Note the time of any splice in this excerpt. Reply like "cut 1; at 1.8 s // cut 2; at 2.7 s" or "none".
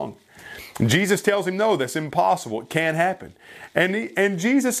none